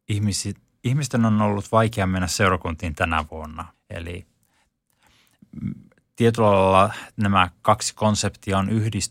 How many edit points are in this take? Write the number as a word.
one